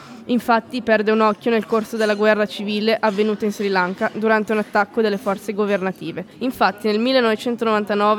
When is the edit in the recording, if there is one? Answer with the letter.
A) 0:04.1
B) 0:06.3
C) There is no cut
B